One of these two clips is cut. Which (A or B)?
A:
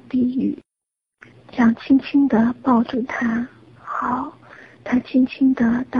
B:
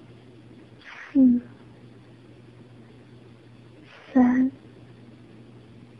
A